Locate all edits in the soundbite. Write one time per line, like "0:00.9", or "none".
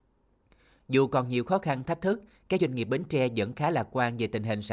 none